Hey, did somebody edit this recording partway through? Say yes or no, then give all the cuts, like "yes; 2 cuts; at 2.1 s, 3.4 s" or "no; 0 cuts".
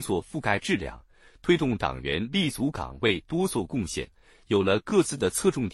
no; 0 cuts